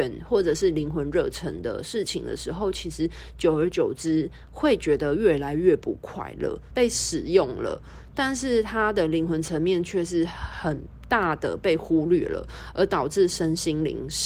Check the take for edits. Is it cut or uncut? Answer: cut